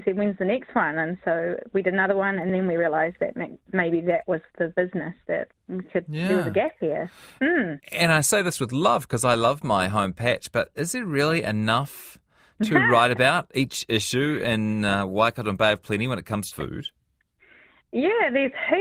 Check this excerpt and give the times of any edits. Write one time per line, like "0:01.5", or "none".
0:16.5